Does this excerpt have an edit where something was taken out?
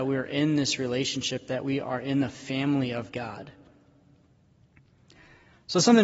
no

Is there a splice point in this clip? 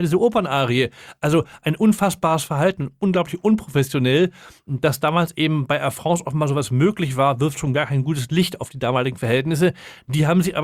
no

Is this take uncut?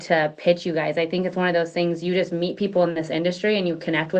yes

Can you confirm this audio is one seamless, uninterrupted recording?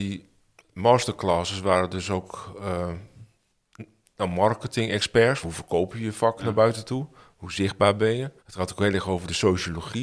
no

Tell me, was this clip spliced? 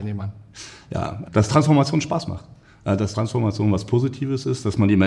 yes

